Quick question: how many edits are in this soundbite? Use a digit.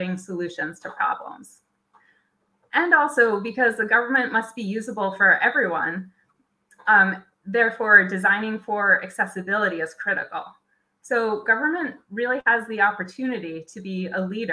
0